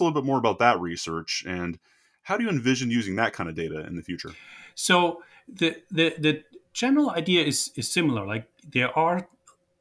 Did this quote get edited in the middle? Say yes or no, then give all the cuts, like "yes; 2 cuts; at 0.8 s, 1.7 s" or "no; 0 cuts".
no; 0 cuts